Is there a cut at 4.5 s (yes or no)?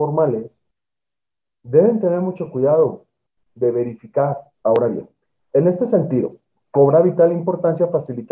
yes